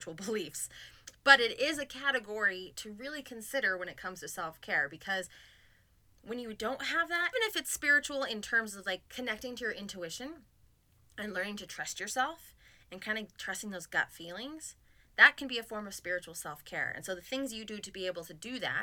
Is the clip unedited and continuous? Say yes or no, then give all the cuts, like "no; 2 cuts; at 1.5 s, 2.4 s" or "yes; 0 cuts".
no; 1 cut; at 7.3 s